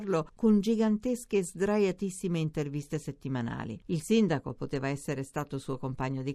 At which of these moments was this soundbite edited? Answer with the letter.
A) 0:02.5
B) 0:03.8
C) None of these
B